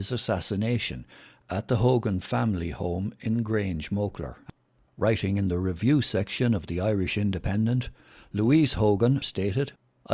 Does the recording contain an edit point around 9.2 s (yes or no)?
yes